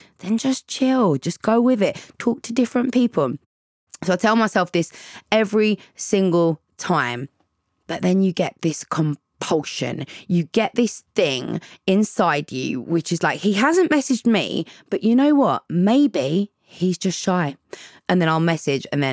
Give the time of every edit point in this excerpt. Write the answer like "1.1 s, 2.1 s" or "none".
none